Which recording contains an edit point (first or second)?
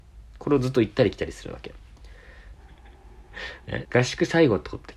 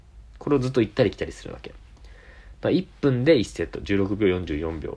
first